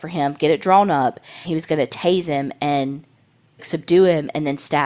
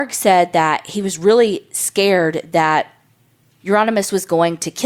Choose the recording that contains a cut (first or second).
first